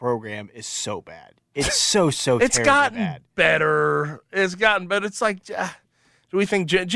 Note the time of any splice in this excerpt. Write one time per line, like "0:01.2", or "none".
none

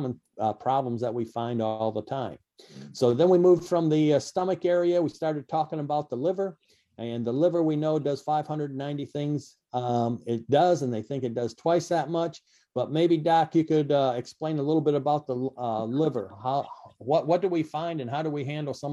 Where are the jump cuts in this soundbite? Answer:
none

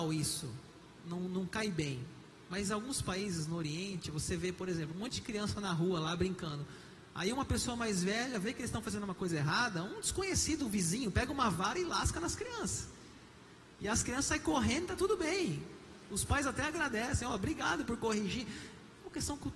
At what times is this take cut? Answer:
none

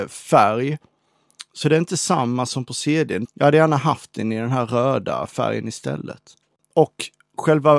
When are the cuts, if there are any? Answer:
0:03.2

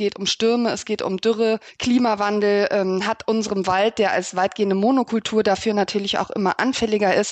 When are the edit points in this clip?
none

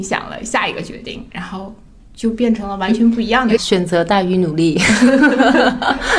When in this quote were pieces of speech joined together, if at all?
0:03.6

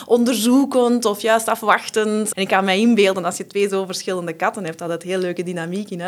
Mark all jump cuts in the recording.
0:02.3

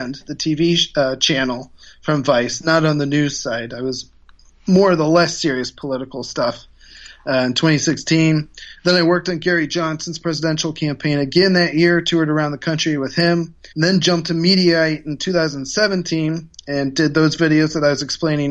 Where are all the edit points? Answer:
0:13.7

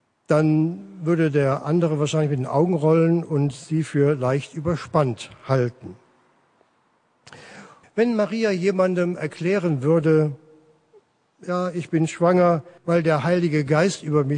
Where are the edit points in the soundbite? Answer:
0:07.8
0:12.8

